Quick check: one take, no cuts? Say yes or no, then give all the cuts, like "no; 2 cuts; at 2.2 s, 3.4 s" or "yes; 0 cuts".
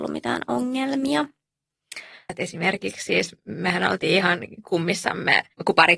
no; 1 cut; at 2.3 s